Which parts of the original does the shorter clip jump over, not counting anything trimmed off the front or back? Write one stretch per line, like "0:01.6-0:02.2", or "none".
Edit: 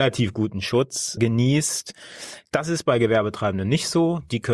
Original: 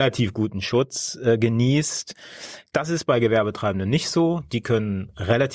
0:01.2-0:01.4

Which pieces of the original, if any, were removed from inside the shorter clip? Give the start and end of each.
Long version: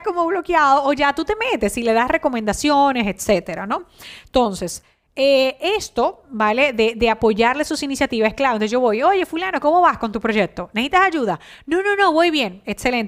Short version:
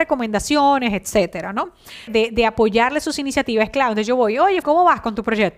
0:04.2-0:06.7
0:09.3-0:09.6

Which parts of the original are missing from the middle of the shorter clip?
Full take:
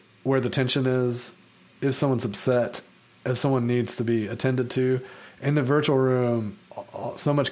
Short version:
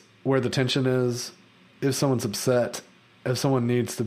none

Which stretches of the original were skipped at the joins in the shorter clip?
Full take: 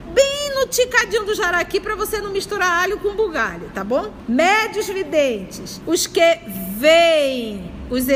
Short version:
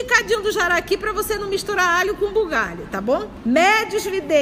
none

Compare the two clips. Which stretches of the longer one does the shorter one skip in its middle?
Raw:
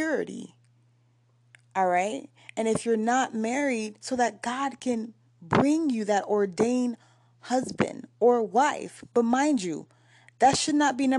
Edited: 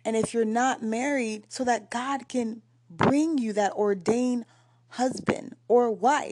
none

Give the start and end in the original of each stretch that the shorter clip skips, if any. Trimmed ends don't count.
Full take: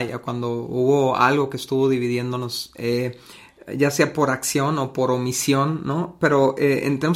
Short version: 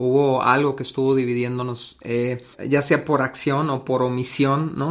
0:03.3-0:03.6

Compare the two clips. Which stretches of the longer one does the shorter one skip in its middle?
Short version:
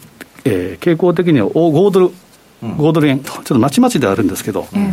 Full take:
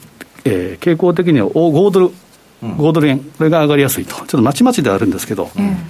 0:03.2-0:04.1

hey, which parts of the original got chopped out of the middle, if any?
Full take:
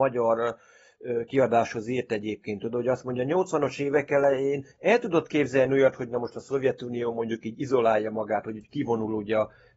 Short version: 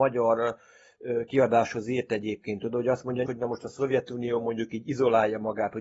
0:03.2-0:06.0

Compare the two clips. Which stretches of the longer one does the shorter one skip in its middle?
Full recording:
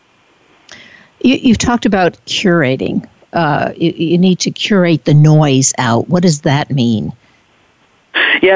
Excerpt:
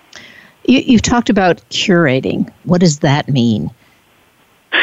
0:03.2-0:06.1

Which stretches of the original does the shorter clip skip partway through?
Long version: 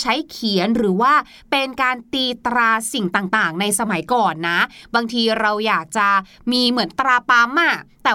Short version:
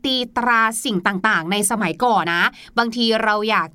0:04.3-0:04.4

